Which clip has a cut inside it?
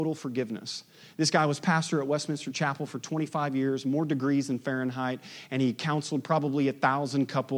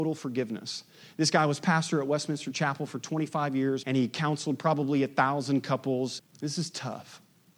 second; 2 cuts; at 3.8 s, 6.2 s

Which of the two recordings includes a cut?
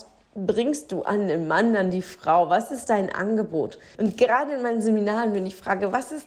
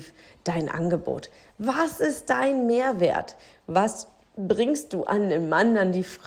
first; 1 cut; at 3.9 s

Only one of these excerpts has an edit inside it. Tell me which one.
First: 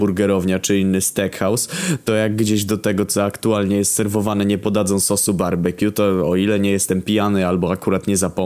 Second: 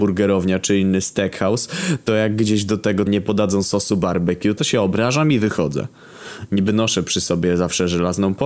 second; 2 cuts; at 3.1 s, 4.6 s

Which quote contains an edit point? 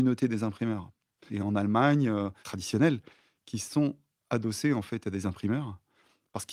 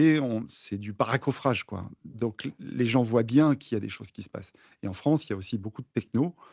first; 2 cuts; at 1.3 s, 2.4 s

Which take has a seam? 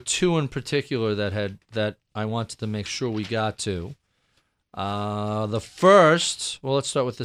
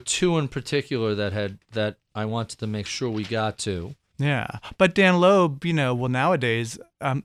second; 1 cut; at 4.1 s

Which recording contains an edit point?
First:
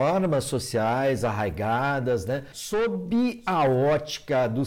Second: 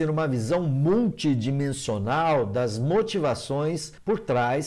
first; 1 cut; at 2.5 s

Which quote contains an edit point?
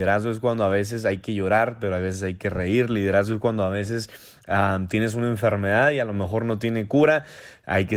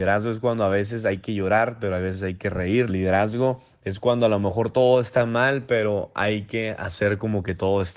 second; 1 cut; at 2.9 s

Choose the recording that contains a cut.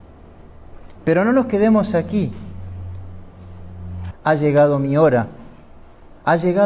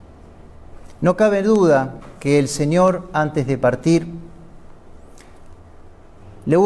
first; 2 cuts; at 1.0 s, 4.1 s

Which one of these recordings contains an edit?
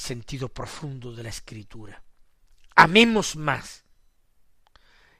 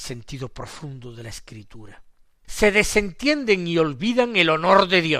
second; 1 cut; at 2.4 s

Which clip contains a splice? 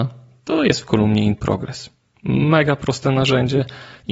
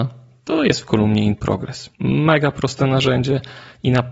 second; 1 cut; at 1.9 s

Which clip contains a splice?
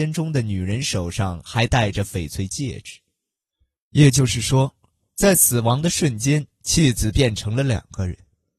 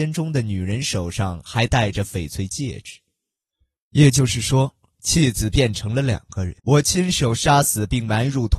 second; 2 cuts; at 5.0 s, 6.6 s

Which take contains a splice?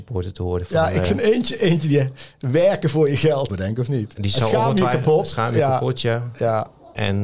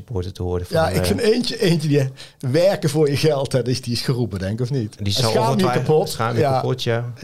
first; 1 cut; at 3.5 s

